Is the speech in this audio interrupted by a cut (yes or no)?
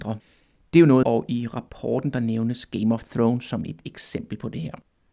yes